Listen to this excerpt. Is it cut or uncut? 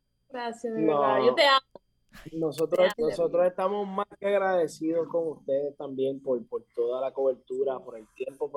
cut